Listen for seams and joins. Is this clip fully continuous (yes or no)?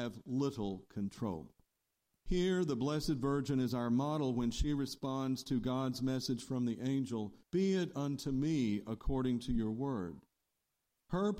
no